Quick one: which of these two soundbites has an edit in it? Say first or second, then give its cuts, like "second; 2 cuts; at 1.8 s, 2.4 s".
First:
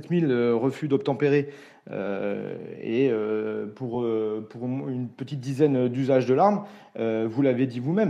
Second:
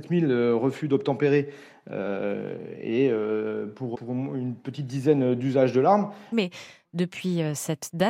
second; 2 cuts; at 3.9 s, 6.3 s